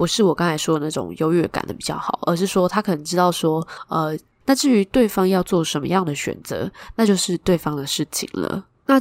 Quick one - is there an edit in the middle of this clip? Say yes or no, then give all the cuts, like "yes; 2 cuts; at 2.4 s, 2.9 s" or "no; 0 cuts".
yes; 1 cut; at 4.4 s